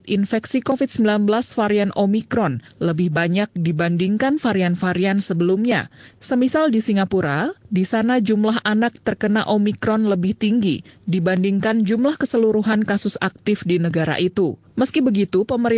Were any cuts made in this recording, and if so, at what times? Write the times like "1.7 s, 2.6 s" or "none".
7.6 s